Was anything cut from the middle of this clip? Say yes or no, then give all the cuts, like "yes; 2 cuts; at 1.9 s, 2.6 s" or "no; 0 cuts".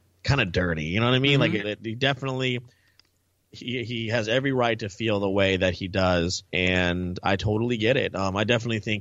yes; 2 cuts; at 1.6 s, 6.5 s